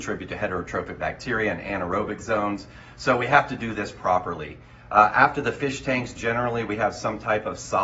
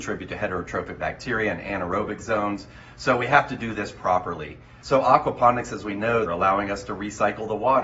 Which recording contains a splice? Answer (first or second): second